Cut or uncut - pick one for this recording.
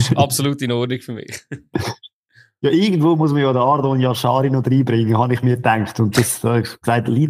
uncut